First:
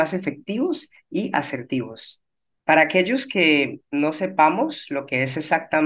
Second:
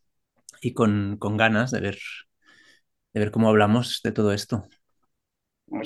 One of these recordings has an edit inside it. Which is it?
first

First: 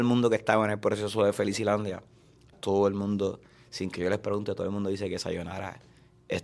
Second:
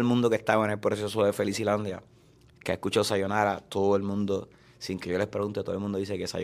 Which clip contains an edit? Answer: first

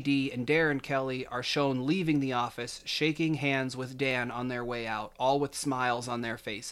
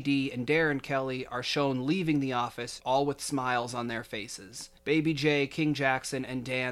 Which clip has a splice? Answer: second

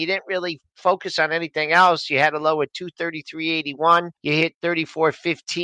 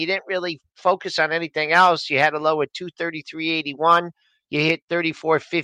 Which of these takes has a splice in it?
first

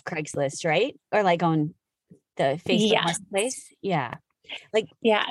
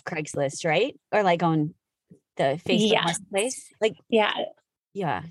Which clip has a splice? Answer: second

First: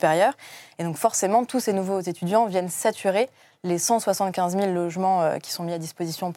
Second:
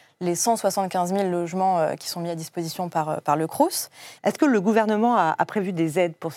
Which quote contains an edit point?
second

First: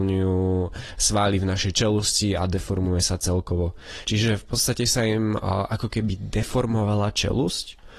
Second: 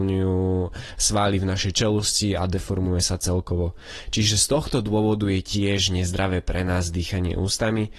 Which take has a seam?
first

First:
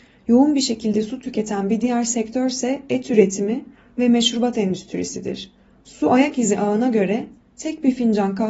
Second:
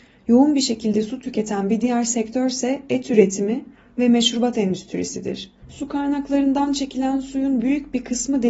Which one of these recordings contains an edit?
second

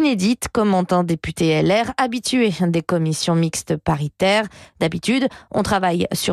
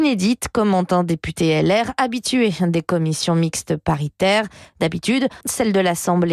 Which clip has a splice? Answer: second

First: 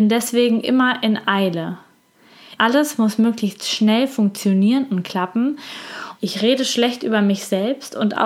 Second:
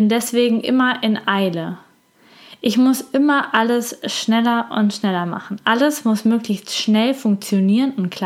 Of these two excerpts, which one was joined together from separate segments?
first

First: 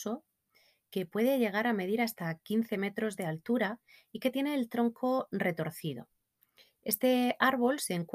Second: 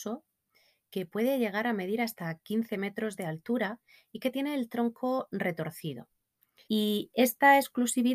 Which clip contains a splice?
second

